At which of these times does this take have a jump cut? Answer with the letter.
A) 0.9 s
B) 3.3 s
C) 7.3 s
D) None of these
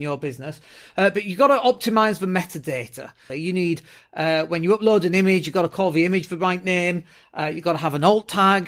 B